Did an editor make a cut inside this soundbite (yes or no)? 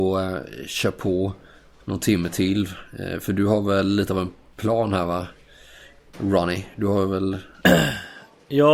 no